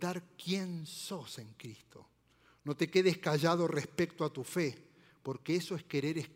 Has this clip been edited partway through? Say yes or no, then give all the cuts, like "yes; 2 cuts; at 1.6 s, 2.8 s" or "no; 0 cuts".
no; 0 cuts